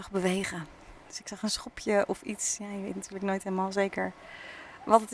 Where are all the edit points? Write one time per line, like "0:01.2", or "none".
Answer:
none